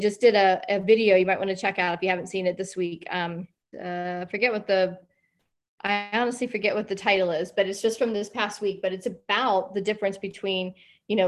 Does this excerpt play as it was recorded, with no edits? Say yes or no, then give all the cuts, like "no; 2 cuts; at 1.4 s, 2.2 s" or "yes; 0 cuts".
no; 1 cut; at 3.7 s